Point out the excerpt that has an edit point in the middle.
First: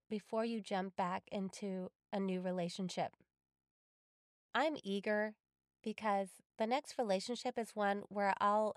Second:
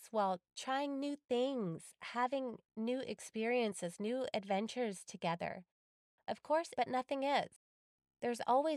second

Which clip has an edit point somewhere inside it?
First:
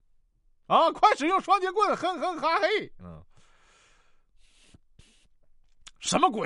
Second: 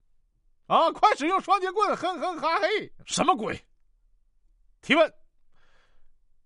second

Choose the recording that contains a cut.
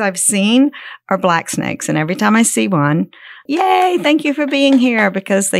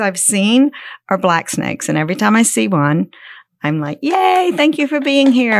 first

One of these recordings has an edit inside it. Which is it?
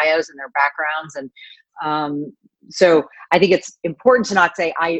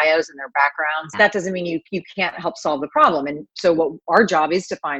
second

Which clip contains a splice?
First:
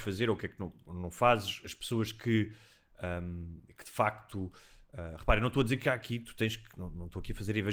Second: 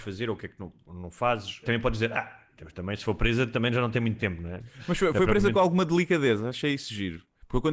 second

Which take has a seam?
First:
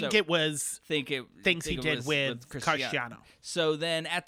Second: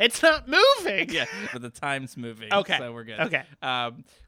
second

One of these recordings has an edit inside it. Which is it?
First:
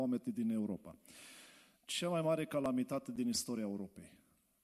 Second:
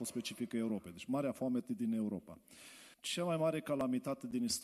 second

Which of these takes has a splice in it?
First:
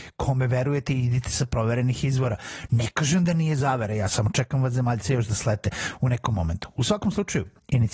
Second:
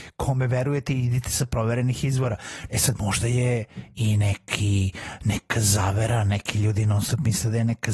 second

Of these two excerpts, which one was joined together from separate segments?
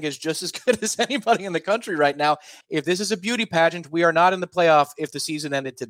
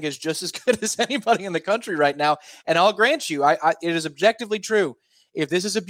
first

